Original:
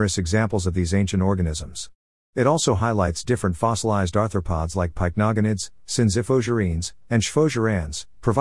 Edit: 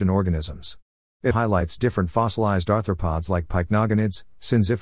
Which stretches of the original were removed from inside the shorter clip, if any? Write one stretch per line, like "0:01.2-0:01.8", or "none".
0:02.4-0:02.8